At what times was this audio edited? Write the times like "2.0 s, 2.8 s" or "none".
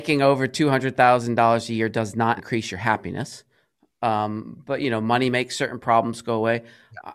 2.4 s